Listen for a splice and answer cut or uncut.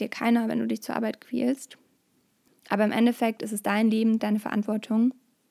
cut